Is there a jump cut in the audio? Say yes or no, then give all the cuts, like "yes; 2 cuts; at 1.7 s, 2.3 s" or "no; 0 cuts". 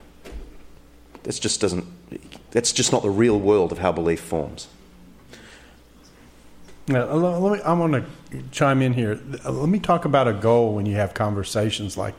no; 0 cuts